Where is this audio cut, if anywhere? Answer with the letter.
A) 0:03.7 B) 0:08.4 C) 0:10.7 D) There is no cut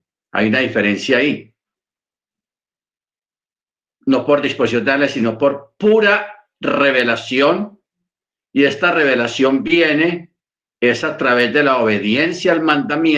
D